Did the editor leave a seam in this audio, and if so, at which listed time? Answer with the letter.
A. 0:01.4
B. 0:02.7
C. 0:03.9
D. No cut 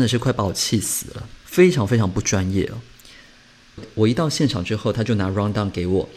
A